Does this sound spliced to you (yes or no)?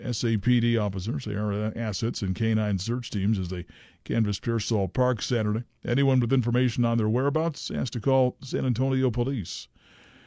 no